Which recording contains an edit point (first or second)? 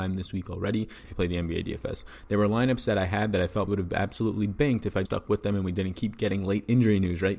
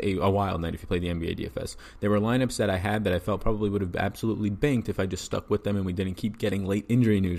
first